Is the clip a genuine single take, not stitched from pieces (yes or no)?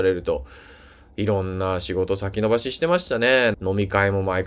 no